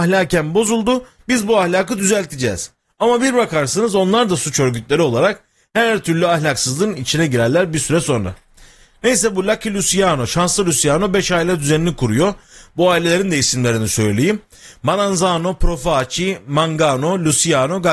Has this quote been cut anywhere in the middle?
no; 0 cuts

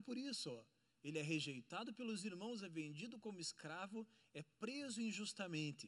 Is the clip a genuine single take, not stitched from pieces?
yes; 0 cuts

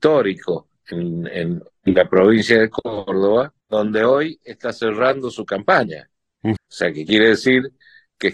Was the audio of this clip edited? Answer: yes; 3 cuts; at 1.8 s, 3.6 s, 6.6 s

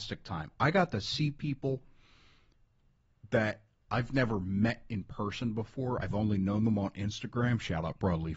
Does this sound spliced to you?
no; 0 cuts

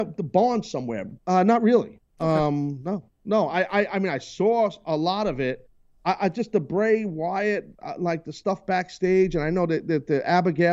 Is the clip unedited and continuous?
no; 1 cut; at 1.2 s

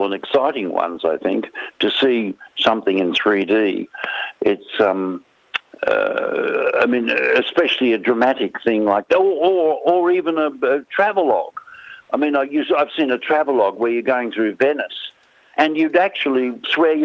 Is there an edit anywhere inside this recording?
no; 0 cuts

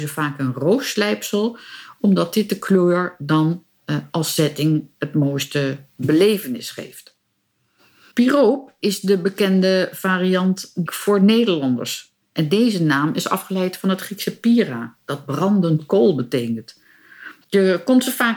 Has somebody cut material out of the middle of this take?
yes; 2 cuts; at 10.9 s, 17.4 s

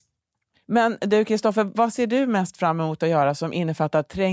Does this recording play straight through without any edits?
yes; 0 cuts

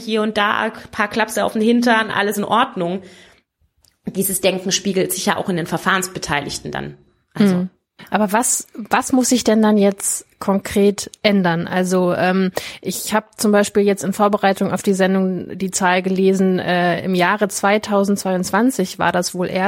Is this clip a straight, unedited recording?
yes; 0 cuts

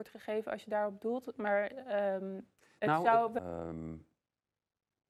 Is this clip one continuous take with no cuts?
no; 1 cut; at 3.4 s

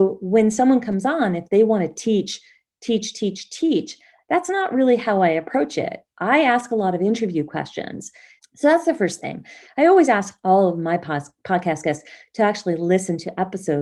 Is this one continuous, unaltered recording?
no; 1 cut; at 8.4 s

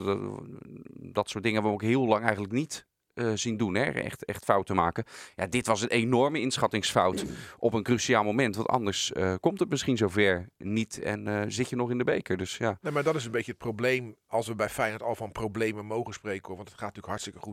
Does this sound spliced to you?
no; 0 cuts

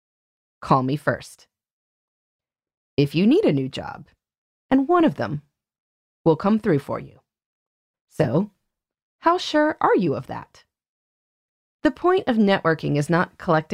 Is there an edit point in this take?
yes; 3 cuts; at 4.6 s, 7.9 s, 11.8 s

